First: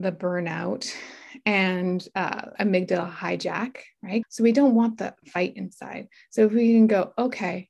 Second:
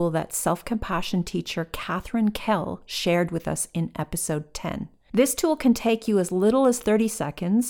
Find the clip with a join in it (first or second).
first